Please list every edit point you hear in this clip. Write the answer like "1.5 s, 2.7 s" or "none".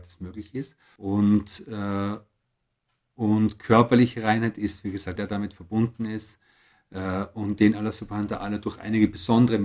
1.0 s, 5.2 s

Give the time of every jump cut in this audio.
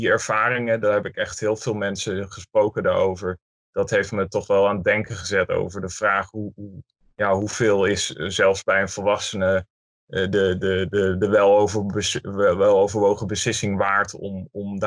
none

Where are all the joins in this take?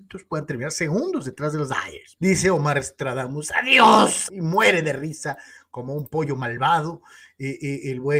2.2 s, 4.3 s

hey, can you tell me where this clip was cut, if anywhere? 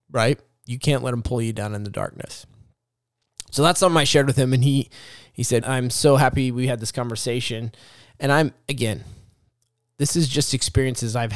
5.6 s

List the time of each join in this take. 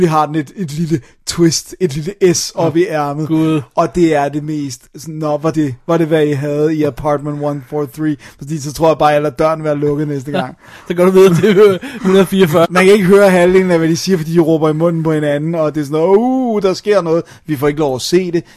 5.5 s, 12.6 s

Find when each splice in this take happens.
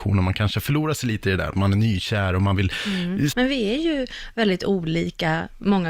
3.3 s

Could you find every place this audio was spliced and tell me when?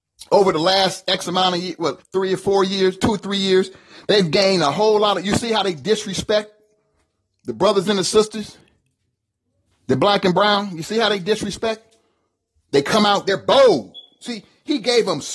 2.0 s

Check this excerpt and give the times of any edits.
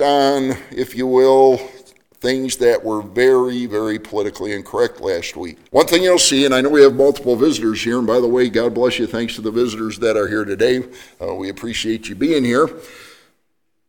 3.7 s, 5.7 s

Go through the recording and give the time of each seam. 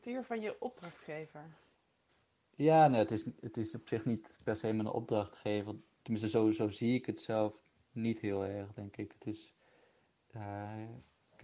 none

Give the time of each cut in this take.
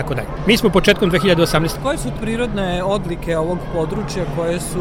1.8 s

